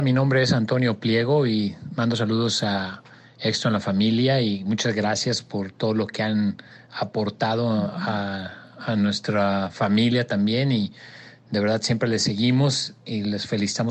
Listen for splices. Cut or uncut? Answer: uncut